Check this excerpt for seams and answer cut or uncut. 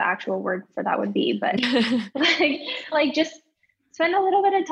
cut